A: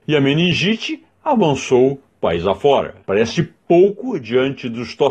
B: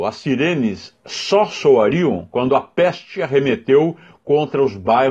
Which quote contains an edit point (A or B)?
A